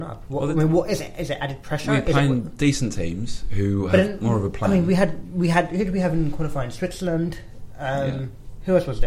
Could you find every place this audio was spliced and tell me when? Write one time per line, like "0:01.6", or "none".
none